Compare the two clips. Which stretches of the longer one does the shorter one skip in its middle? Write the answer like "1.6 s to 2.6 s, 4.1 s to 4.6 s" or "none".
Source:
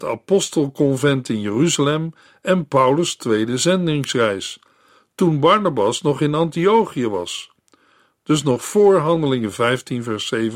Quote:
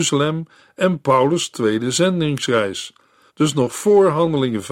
4.9 s to 8.2 s